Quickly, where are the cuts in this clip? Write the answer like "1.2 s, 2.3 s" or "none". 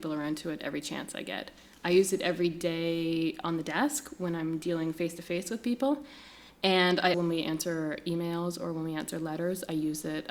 7.1 s